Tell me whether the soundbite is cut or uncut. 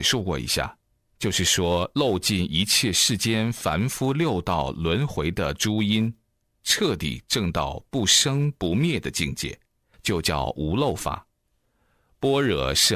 uncut